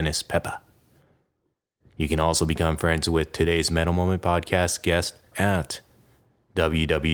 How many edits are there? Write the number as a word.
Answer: two